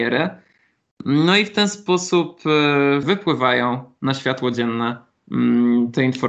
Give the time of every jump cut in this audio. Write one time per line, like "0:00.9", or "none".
0:03.0